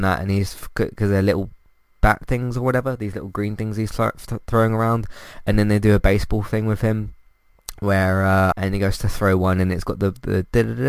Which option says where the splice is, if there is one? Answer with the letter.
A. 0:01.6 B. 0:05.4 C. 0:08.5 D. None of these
C